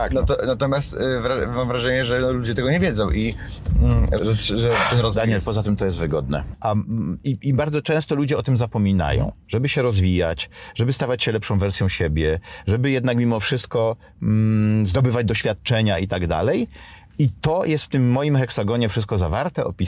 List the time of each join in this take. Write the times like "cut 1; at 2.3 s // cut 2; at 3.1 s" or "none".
cut 1; at 4.2 s // cut 2; at 6.5 s